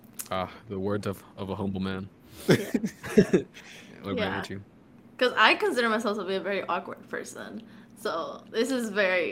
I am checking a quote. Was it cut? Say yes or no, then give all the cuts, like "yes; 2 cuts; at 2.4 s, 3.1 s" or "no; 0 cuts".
no; 0 cuts